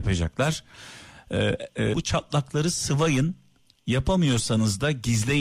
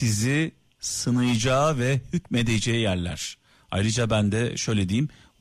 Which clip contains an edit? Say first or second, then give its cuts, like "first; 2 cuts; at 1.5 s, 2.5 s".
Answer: first; 1 cut; at 1.9 s